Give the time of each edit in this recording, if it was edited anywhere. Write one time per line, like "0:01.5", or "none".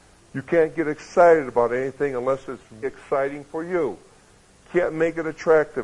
0:02.8